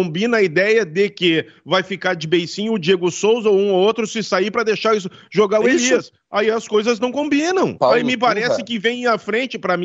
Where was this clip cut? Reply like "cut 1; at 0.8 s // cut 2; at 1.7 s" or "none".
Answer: cut 1; at 7.8 s